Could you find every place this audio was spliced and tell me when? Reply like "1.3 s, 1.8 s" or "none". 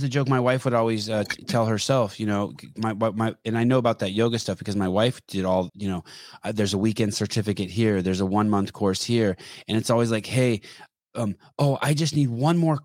5.7 s